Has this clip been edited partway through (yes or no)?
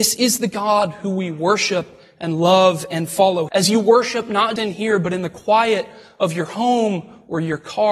yes